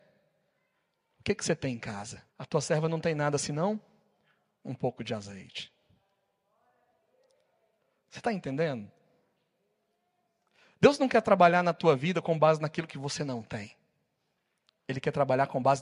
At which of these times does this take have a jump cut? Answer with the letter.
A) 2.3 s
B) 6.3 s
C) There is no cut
A